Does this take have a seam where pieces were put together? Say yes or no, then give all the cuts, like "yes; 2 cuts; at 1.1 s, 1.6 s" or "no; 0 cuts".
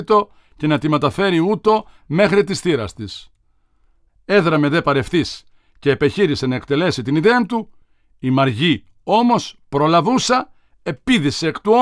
no; 0 cuts